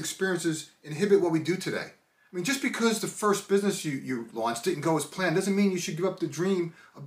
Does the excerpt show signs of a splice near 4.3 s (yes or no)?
yes